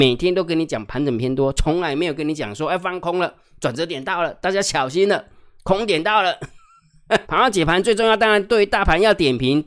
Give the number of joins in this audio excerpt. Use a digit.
1